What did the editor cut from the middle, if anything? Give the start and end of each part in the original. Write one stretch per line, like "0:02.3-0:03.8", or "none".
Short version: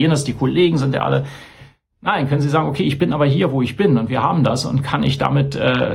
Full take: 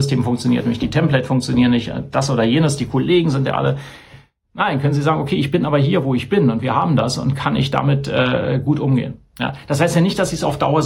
none